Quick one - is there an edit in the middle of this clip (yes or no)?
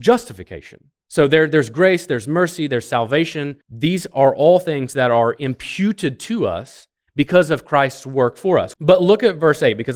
yes